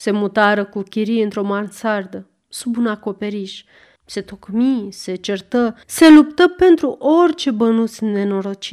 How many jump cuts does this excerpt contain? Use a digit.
2